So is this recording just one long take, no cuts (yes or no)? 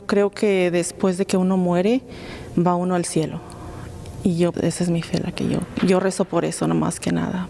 no